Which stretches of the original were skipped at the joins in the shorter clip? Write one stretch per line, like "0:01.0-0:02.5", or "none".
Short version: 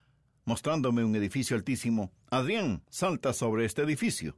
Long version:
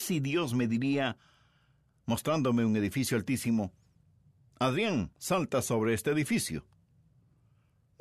0:03.8-0:04.5

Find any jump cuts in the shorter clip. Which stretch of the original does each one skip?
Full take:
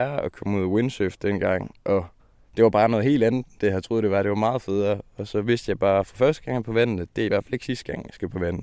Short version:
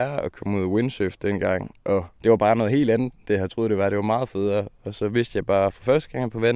0:02.1-0:02.5

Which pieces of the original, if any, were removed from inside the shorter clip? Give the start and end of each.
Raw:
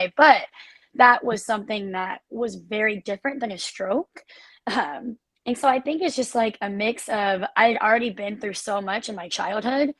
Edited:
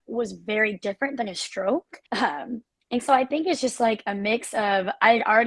0:04.3-0:04.6

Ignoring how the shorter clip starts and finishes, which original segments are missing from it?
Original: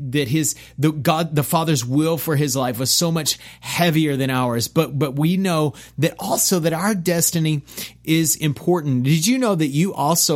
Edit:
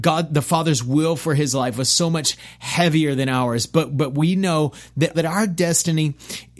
0:06.2-0:06.6

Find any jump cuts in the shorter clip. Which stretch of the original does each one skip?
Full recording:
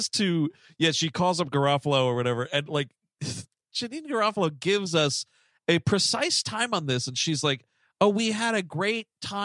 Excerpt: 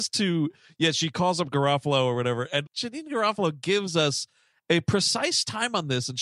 0:02.7-0:03.7

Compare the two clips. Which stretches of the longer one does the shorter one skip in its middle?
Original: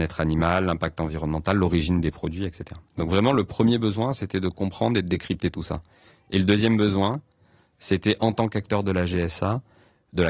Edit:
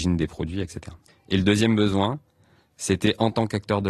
0:02.9-0:06.1

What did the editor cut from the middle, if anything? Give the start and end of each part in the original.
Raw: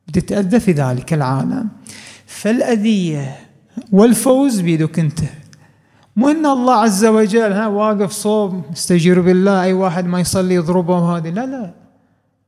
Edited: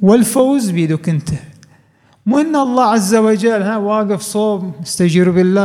none

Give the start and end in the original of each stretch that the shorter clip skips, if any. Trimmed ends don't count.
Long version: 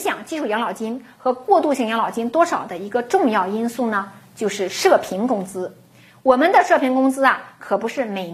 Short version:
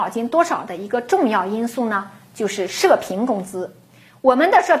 none

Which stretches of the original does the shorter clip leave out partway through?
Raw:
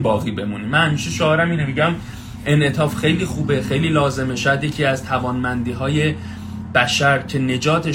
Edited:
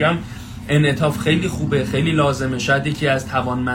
none

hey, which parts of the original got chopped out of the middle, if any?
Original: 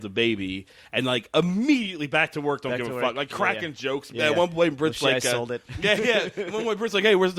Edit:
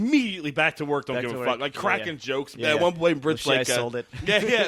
none

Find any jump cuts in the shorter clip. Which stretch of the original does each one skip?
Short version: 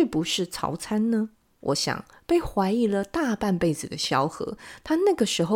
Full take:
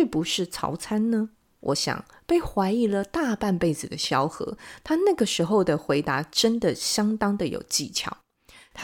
none

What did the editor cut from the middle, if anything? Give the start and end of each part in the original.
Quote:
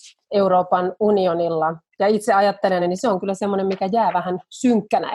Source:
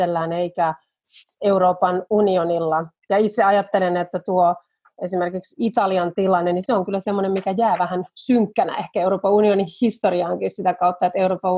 0:03.9-0:06.4

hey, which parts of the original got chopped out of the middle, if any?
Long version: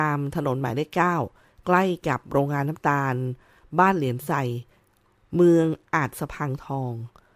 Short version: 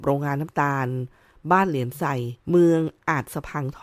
0:04.7-0:05.3

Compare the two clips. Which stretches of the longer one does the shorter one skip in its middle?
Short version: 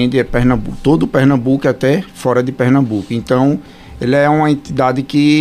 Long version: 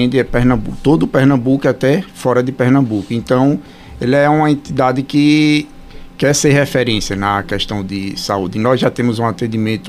none

